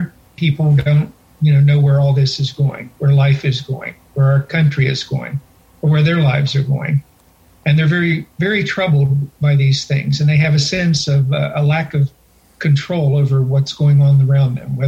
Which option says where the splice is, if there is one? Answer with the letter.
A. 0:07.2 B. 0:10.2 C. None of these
C